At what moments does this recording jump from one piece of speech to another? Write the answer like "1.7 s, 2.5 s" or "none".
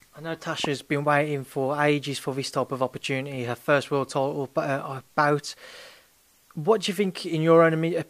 none